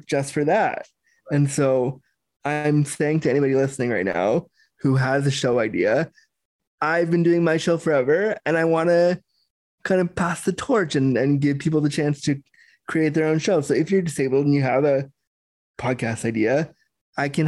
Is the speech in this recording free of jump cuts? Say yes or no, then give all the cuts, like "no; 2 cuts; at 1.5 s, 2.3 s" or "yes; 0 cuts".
yes; 0 cuts